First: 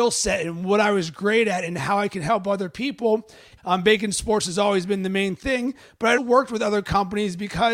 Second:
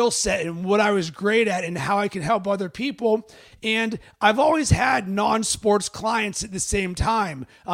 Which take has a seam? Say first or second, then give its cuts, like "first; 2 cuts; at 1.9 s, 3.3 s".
first; 2 cuts; at 3.6 s, 6.2 s